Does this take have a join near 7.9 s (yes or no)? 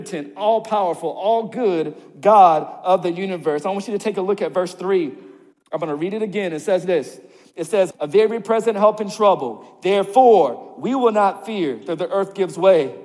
yes